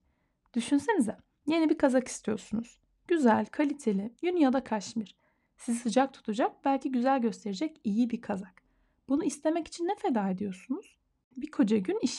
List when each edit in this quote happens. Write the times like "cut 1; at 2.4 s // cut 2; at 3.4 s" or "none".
none